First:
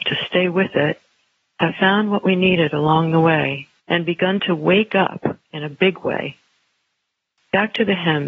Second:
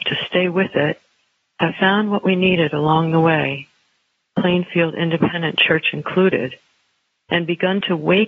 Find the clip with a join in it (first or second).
first